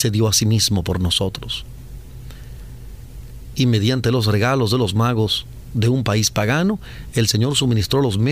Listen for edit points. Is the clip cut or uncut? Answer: cut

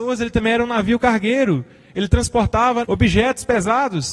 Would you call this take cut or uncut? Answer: cut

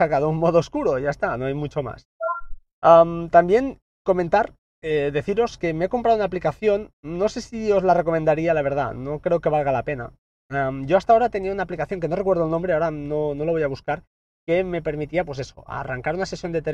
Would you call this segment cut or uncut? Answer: uncut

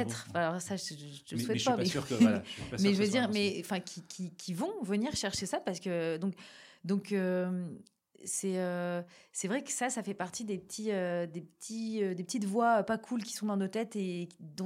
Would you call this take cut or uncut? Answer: uncut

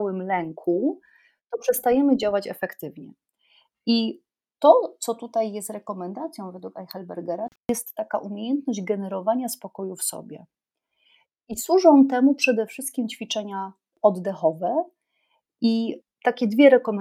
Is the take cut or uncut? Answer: uncut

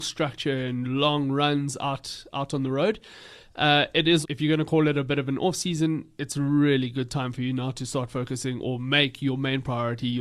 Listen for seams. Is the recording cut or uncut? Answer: cut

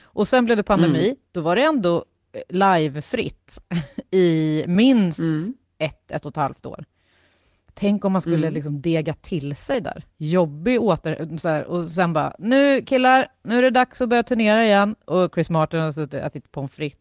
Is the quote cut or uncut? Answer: uncut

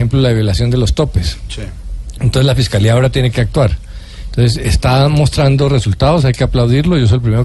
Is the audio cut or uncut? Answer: uncut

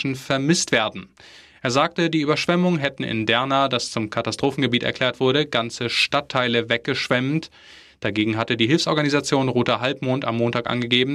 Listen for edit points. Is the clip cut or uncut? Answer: uncut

